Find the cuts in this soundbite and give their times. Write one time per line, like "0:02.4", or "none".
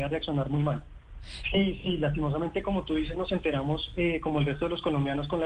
0:01.4